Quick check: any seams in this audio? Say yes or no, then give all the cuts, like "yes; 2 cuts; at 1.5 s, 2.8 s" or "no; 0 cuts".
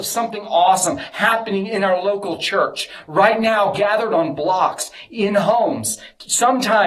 no; 0 cuts